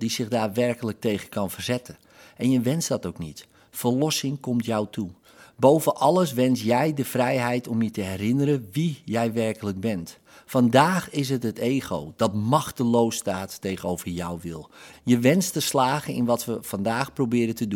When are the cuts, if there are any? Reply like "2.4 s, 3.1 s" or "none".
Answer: 14.9 s